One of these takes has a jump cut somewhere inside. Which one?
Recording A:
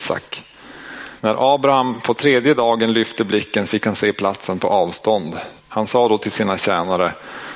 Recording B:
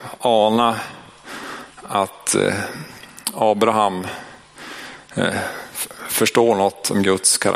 A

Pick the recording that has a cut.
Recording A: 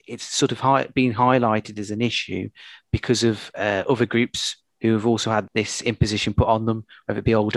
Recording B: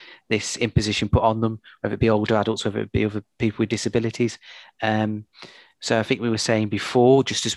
A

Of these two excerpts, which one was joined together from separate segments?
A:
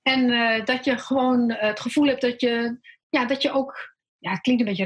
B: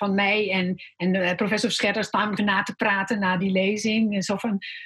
B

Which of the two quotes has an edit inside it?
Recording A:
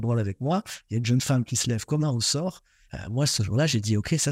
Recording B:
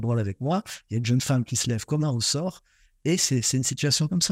A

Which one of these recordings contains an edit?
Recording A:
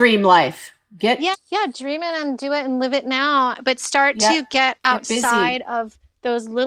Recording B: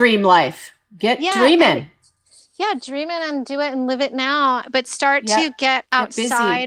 A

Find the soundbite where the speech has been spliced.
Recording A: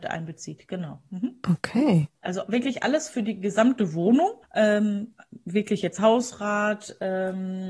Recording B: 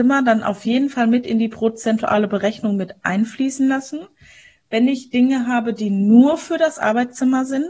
A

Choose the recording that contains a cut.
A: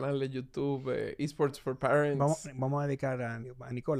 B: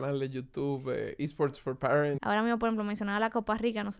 B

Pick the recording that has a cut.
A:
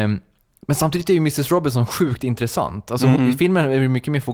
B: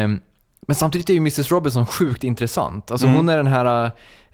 A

